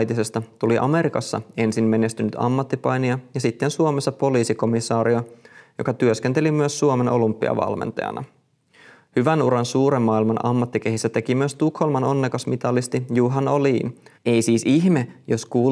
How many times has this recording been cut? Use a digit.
1